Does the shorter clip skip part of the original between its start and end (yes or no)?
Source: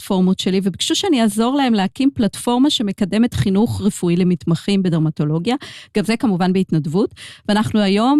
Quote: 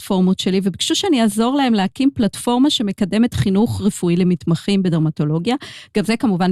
no